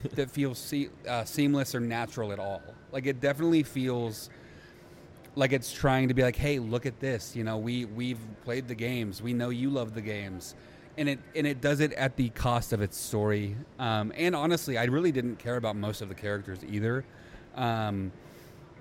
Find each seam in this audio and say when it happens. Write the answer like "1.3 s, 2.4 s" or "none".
none